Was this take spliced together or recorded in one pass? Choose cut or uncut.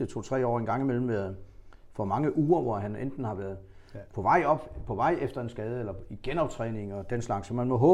uncut